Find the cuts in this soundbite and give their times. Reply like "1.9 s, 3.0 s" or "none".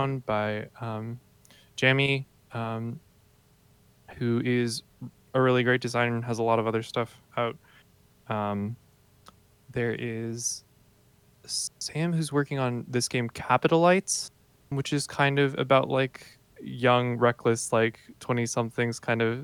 14.7 s, 16.5 s